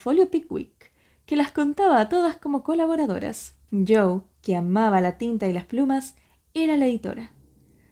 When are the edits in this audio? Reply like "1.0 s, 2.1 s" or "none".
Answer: 3.6 s